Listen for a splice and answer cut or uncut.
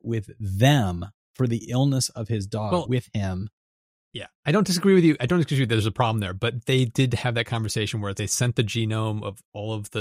cut